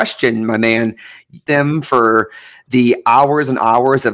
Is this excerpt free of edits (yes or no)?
no